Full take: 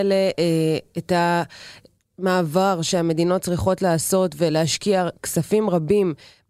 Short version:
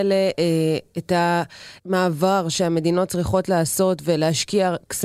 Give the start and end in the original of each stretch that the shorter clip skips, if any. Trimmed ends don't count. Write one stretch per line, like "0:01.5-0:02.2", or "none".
0:01.8-0:02.1